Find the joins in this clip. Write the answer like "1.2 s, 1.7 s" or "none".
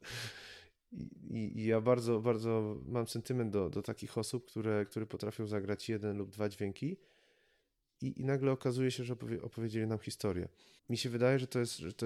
10.8 s